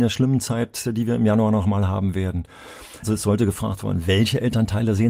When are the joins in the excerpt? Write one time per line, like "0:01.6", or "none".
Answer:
0:03.0